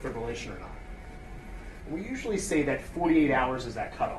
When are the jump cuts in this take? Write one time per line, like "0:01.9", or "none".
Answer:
0:01.8